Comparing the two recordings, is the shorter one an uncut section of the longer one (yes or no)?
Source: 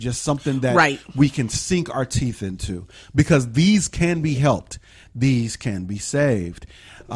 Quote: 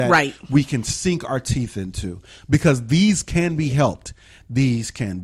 yes